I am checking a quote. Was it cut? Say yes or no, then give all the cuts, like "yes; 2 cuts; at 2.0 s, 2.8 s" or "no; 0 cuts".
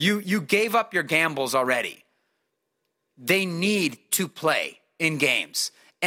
no; 0 cuts